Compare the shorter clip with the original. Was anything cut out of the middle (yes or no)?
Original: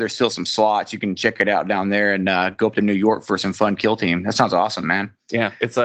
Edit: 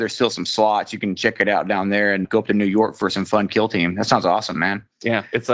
yes